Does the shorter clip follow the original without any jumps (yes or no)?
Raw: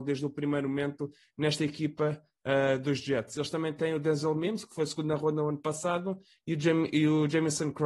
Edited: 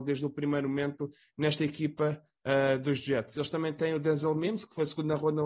yes